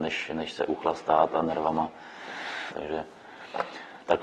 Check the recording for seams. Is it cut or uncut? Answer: cut